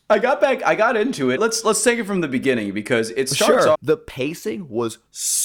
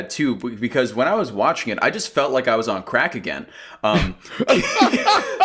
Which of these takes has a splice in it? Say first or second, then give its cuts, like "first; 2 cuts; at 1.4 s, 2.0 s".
first; 2 cuts; at 1.4 s, 3.7 s